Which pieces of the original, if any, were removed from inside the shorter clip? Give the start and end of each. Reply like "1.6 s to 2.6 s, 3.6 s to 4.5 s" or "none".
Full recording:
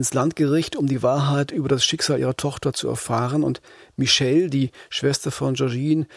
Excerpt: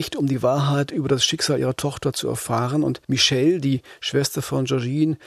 3.6 s to 3.9 s